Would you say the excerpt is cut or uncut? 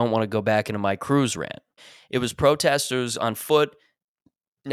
cut